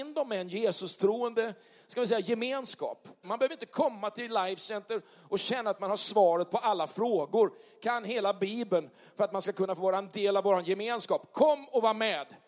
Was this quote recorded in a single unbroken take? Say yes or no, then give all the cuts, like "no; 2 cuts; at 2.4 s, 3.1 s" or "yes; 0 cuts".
no; 1 cut; at 3.2 s